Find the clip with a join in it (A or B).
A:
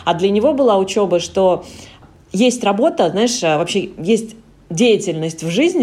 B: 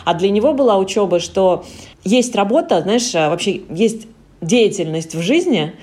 B